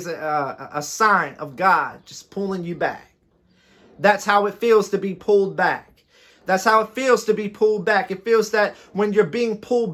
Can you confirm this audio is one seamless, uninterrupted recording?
yes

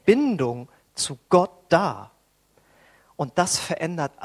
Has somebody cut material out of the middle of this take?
no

